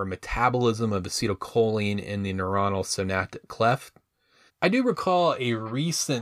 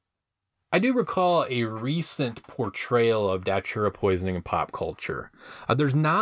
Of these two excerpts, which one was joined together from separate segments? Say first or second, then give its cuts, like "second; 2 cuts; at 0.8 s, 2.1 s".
first; 1 cut; at 4.5 s